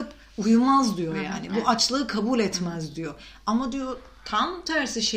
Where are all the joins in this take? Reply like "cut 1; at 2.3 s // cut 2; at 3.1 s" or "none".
none